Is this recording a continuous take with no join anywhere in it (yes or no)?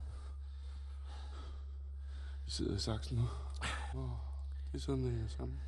no